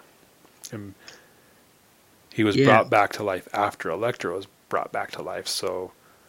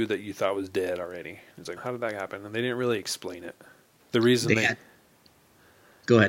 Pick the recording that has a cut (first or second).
second